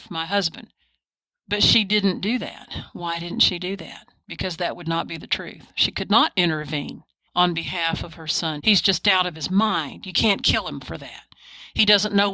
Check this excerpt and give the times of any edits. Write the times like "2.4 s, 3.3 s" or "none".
8.6 s